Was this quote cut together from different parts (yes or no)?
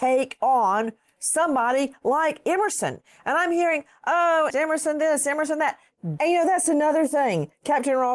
yes